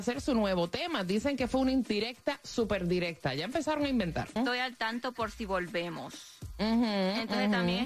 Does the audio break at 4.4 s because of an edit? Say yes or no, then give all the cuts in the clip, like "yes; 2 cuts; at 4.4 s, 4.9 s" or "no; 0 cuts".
yes; 1 cut; at 4.4 s